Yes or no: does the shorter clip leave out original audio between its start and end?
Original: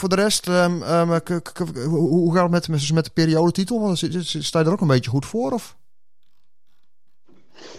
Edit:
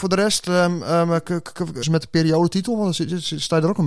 yes